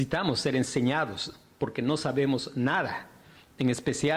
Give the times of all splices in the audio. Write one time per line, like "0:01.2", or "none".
none